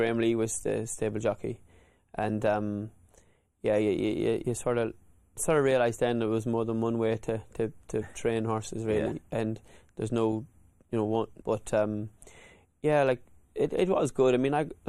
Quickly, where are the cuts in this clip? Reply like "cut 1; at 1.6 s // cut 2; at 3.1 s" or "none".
cut 1; at 11.4 s